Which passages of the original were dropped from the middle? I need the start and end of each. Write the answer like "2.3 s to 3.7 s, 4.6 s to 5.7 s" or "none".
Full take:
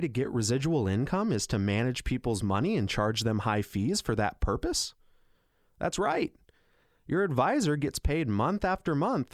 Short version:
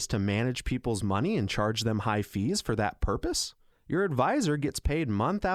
5.1 s to 6.9 s